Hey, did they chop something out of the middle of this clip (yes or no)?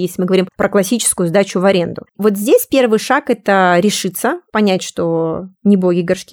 yes